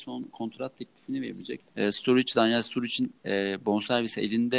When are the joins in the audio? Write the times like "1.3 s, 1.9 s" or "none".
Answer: 1.6 s, 3.2 s